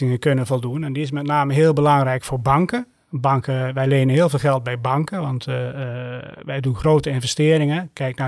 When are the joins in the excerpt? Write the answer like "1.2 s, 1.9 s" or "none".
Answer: none

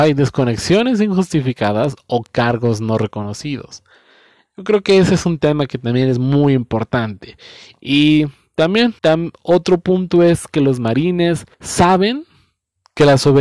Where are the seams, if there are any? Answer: 9.0 s, 11.5 s

